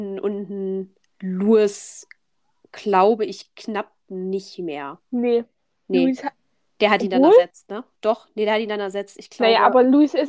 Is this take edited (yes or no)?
no